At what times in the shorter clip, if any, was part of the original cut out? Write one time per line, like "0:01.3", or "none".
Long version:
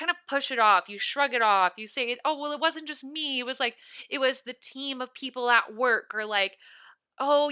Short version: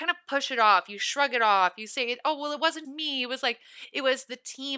0:02.8